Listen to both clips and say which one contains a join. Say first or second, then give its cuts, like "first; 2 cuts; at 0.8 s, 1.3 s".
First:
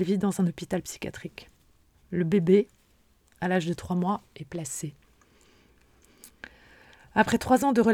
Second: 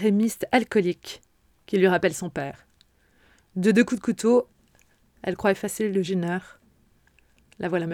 first; 1 cut; at 1.9 s